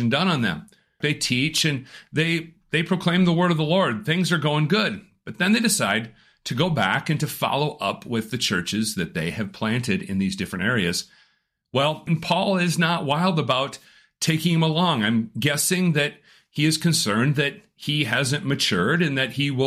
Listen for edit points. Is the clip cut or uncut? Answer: cut